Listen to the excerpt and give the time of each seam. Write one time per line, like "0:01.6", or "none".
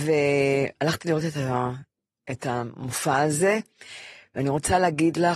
none